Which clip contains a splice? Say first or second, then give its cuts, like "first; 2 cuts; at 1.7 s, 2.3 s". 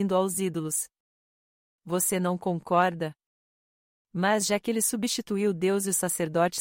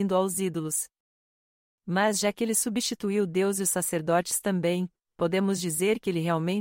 second; 1 cut; at 1.7 s